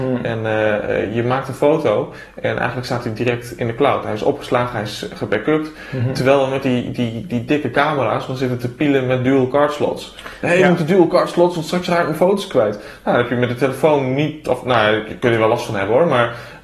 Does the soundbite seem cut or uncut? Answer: uncut